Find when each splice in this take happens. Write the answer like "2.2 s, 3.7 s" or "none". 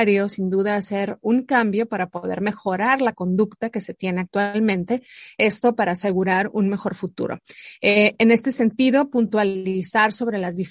none

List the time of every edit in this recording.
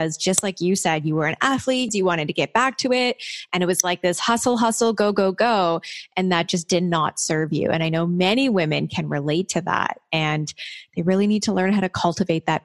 1.9 s

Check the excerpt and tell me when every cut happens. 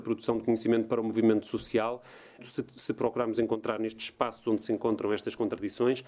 2.4 s

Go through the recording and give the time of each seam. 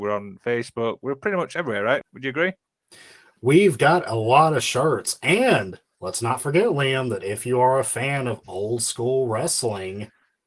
2.0 s

